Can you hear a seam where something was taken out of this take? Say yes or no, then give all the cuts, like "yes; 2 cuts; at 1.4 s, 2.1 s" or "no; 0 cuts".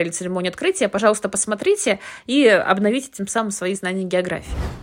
no; 0 cuts